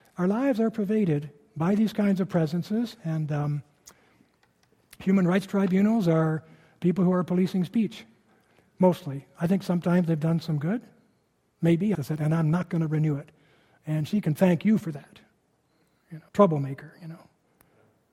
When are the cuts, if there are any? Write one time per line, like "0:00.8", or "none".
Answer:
0:11.9
0:16.3